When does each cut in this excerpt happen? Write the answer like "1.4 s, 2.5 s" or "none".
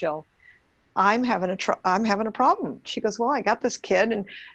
2.8 s